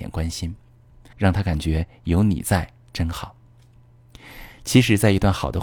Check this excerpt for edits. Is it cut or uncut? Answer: cut